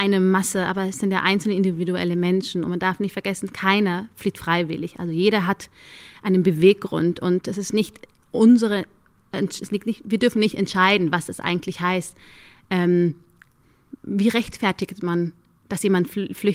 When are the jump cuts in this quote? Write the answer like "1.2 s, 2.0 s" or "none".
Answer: none

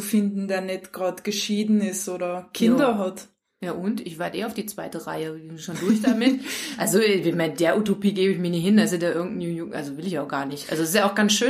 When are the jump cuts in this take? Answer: none

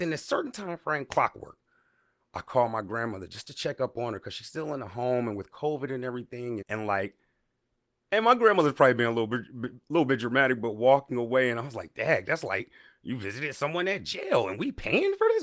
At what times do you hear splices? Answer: 6.6 s

